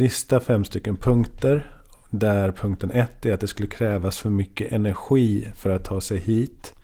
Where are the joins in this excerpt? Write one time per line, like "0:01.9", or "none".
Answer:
none